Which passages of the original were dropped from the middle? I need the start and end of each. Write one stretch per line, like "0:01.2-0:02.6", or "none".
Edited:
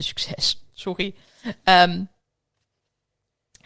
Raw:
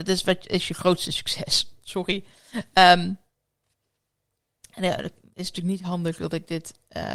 none